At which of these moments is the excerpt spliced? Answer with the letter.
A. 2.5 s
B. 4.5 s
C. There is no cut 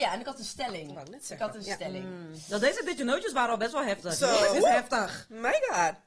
B